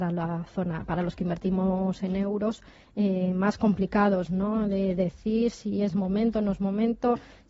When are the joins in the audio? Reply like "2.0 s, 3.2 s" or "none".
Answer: none

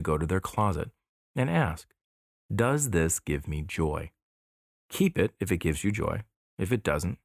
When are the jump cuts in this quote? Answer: 1.2 s

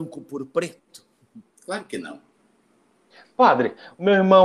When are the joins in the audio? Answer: none

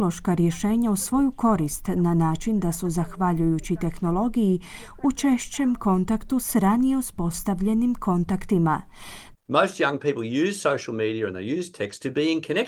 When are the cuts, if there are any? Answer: 9.3 s

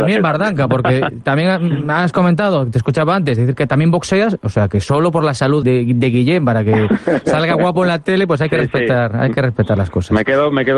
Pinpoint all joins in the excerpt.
5.6 s

